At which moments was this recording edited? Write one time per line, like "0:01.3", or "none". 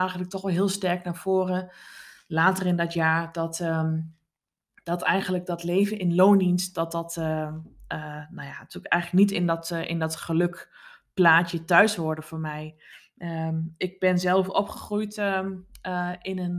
none